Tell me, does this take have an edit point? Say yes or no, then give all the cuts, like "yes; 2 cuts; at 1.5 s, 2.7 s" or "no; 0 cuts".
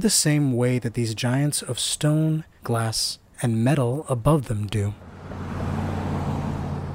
no; 0 cuts